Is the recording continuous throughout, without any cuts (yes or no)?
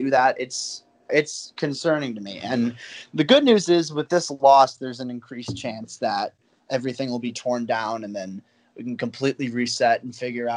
no